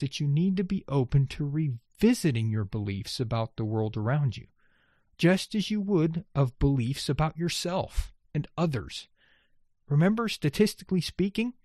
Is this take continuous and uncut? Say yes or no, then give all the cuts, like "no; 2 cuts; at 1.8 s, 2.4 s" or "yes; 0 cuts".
no; 1 cut; at 9.8 s